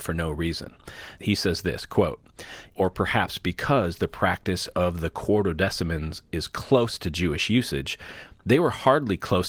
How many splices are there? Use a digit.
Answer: 2